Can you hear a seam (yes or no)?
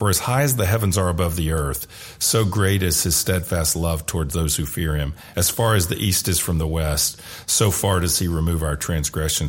no